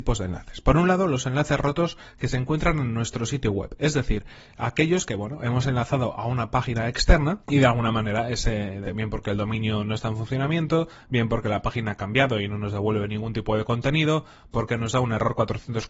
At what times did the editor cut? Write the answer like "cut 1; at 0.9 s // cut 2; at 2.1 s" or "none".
cut 1; at 7.4 s // cut 2; at 8.8 s